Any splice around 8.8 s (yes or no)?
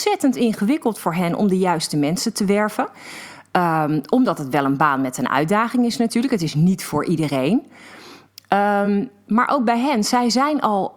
no